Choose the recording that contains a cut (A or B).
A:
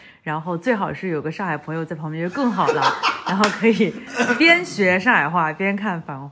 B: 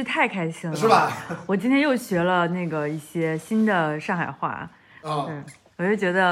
B